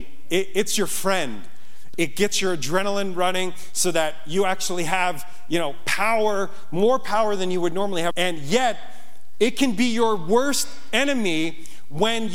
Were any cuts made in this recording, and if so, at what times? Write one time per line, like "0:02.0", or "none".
0:01.9
0:08.1